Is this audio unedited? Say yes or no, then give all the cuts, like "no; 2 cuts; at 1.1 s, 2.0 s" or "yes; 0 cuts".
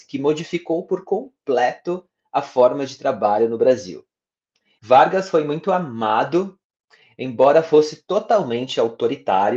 no; 1 cut; at 4.8 s